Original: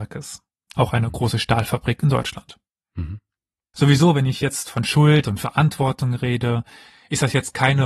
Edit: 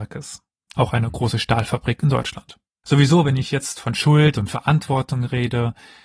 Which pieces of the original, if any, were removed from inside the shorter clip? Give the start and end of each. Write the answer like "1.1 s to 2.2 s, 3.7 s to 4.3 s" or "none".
2.8 s to 3.7 s